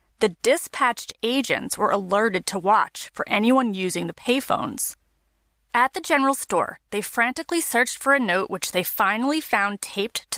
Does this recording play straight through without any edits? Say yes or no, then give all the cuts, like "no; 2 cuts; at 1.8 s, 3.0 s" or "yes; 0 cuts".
no; 1 cut; at 5.5 s